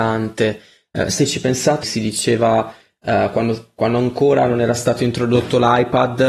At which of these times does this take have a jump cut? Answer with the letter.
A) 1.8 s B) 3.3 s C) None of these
A